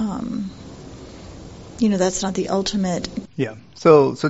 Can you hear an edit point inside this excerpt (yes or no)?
yes